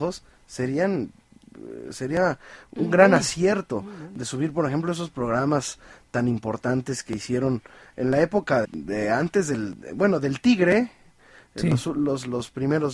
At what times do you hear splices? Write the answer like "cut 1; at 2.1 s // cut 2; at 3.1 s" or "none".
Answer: cut 1; at 8.6 s

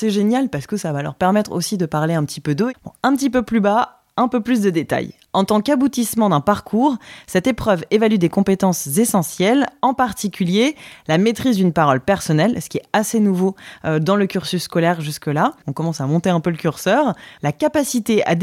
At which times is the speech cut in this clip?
cut 1; at 2.7 s // cut 2; at 15.6 s // cut 3; at 17.4 s

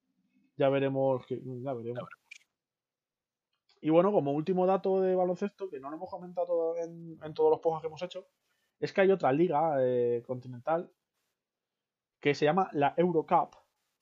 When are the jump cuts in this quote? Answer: none

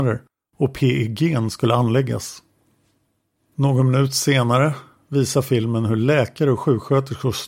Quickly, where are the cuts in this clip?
none

